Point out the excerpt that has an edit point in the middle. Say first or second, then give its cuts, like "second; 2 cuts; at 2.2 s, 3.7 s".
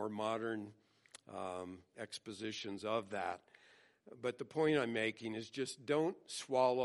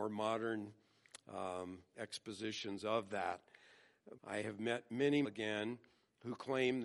second; 2 cuts; at 4.2 s, 5.2 s